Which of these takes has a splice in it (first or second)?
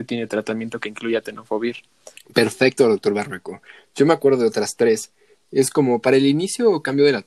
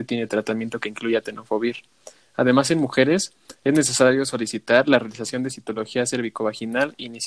first